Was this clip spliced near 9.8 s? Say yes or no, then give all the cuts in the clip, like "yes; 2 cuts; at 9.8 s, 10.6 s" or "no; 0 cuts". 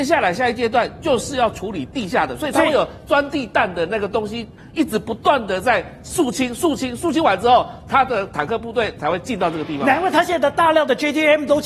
no; 0 cuts